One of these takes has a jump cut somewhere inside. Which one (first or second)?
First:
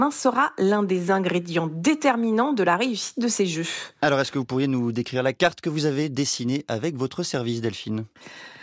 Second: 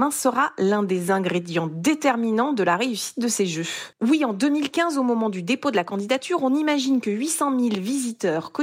second